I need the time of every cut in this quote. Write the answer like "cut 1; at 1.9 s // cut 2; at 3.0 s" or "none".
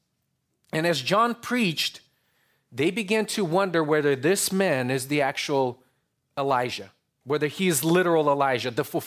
none

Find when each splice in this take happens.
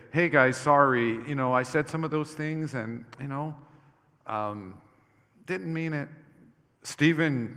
cut 1; at 6.6 s

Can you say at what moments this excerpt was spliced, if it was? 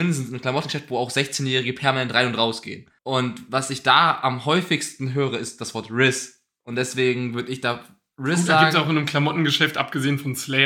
cut 1; at 3.0 s

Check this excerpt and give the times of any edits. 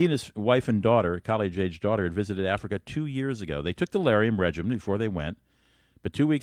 none

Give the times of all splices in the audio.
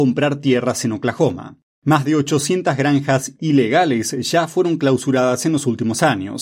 cut 1; at 1.7 s

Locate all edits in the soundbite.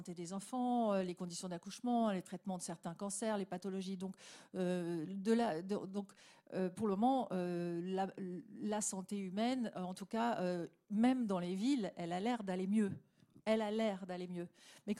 none

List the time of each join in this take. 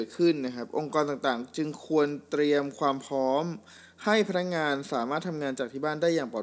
none

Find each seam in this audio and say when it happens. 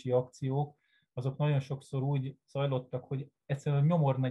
none

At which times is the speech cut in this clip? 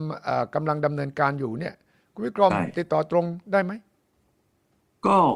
none

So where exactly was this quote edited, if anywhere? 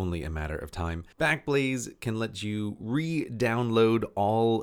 cut 1; at 1.1 s

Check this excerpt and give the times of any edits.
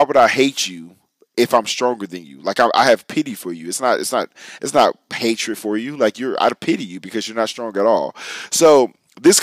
none

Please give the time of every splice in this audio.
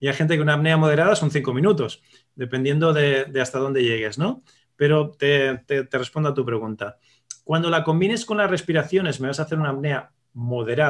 none

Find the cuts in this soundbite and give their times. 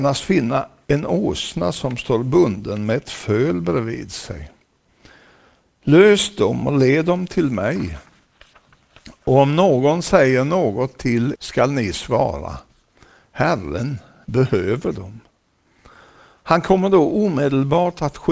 cut 1; at 11.4 s

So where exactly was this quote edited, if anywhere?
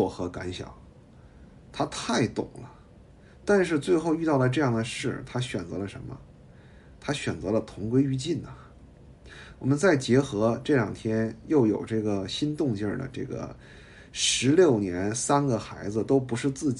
cut 1; at 1.5 s

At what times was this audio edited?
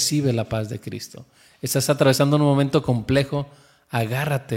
none

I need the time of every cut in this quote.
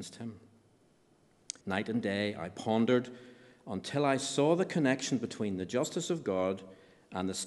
cut 1; at 1.6 s

